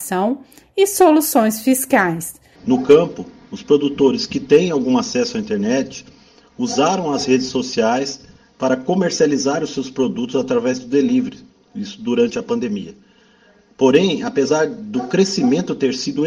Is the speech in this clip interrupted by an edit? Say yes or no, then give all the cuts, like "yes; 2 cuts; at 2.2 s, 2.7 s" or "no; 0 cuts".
yes; 1 cut; at 2.6 s